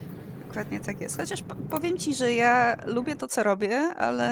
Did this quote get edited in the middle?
no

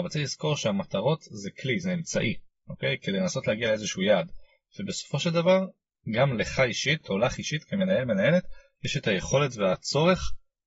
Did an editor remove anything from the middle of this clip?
no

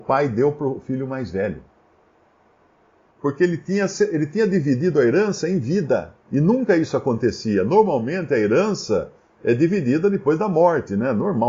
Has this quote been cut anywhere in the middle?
yes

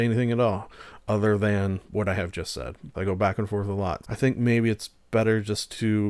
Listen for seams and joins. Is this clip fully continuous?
no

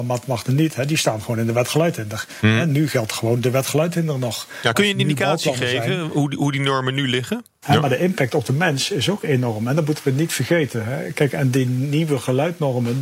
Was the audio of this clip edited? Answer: yes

